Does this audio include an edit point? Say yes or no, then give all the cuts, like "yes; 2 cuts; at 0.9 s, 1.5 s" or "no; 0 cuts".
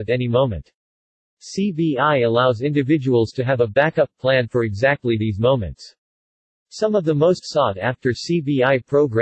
no; 0 cuts